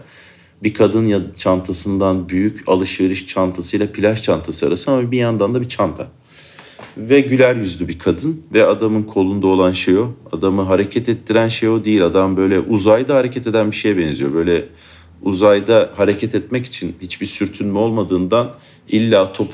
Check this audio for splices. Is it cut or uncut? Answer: uncut